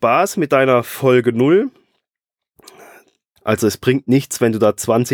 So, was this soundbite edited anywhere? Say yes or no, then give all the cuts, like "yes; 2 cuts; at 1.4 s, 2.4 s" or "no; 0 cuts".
yes; 1 cut; at 3.4 s